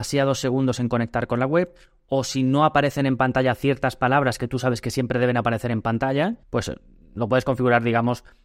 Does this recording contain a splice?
yes; 1 cut; at 6.4 s

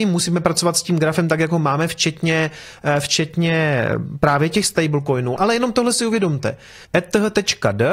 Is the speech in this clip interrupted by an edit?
yes; 2 cuts; at 5.4 s, 6.8 s

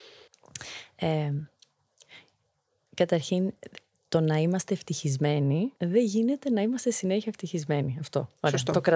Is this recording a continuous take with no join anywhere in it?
no; 1 cut; at 5.8 s

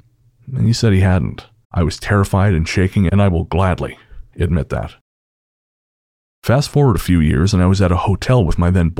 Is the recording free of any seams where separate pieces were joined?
no; 2 cuts; at 1.6 s, 3.1 s

